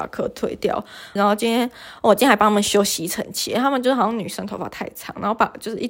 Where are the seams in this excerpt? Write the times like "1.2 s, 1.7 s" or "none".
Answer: 1.2 s